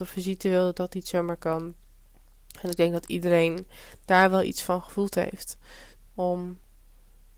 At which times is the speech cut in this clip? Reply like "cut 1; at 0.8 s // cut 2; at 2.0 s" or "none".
cut 1; at 6.0 s

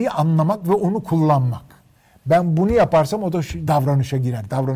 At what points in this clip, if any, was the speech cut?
cut 1; at 3.7 s

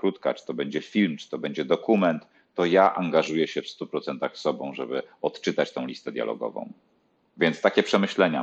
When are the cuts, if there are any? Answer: none

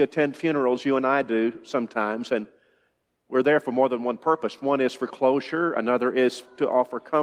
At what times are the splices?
none

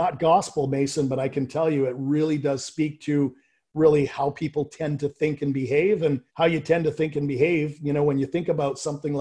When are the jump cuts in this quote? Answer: cut 1; at 6.3 s

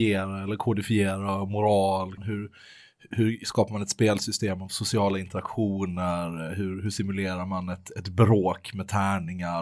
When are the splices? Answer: cut 1; at 2.2 s

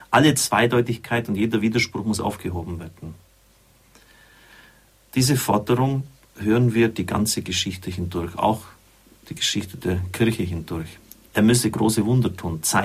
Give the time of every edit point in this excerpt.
cut 1; at 11.3 s

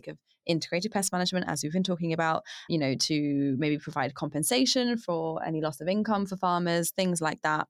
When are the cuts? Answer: cut 1; at 2.7 s

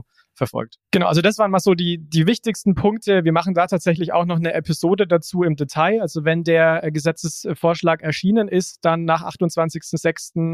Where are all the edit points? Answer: none

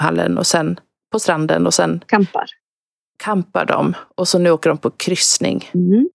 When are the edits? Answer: none

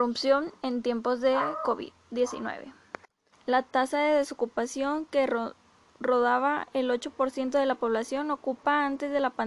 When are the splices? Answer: cut 1; at 3.3 s

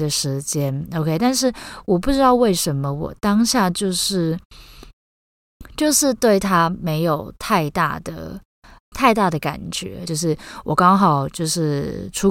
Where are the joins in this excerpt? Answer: cut 1; at 8.9 s // cut 2; at 10.1 s

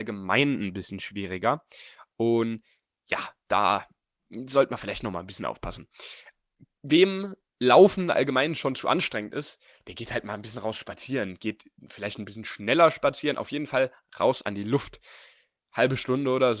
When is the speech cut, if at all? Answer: none

